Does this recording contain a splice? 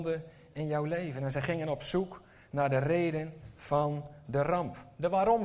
no; 0 cuts

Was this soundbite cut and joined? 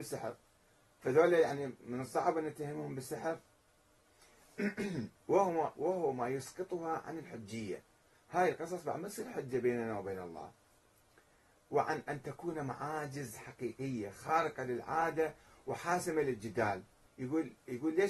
yes; 1 cut; at 17.1 s

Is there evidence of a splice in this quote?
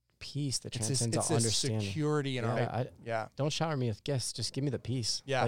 yes; 1 cut; at 2.6 s

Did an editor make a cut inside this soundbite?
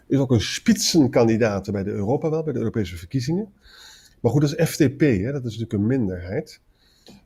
no; 0 cuts

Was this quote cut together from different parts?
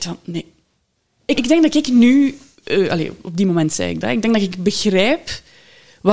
yes; 1 cut; at 1.4 s

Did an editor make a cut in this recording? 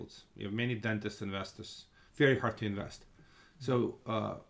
yes; 1 cut; at 2.1 s

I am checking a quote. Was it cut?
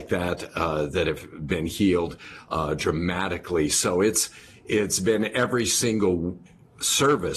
no; 0 cuts

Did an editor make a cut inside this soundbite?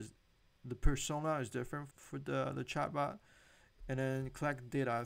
yes; 1 cut; at 1.9 s

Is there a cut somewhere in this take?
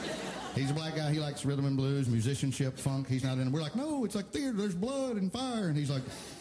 no; 0 cuts

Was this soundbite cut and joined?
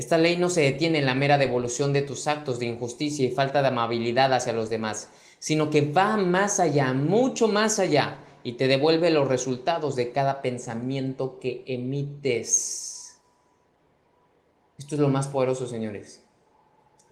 no; 0 cuts

